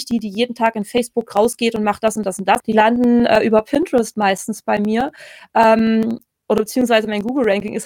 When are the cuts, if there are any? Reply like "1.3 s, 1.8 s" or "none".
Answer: 2.6 s